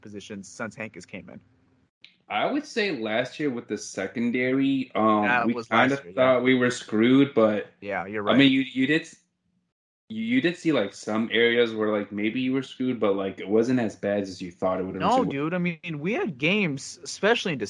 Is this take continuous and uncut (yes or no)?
yes